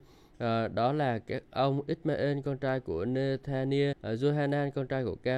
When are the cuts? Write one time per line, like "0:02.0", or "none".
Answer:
0:03.9